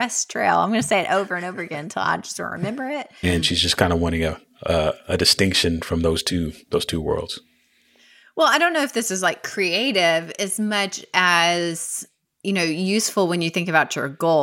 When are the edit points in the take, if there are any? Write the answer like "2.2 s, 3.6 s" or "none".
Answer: 3.2 s